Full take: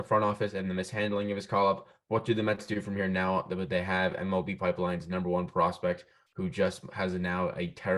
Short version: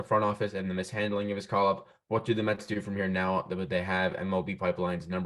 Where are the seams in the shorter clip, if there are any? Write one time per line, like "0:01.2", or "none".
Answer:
none